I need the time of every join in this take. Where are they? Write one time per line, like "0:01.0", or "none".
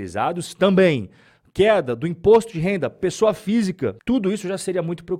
none